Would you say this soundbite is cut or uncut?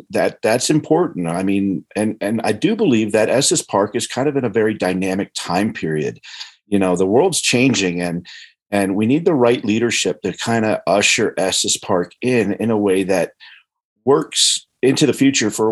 uncut